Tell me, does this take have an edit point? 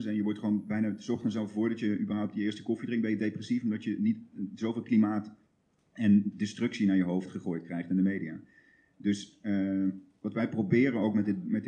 no; 0 cuts

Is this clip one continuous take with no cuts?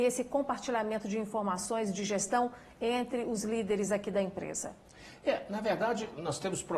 yes; 0 cuts

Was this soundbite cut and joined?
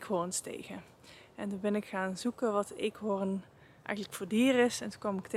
no; 0 cuts

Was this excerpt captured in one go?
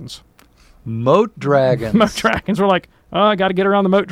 yes; 0 cuts

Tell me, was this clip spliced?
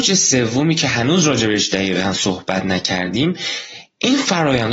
no; 0 cuts

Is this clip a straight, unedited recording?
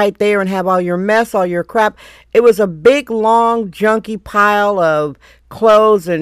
yes; 0 cuts

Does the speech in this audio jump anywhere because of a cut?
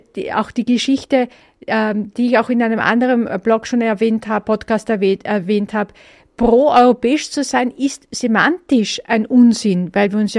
no; 0 cuts

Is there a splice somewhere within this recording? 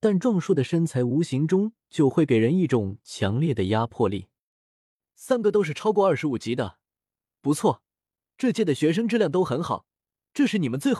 no; 0 cuts

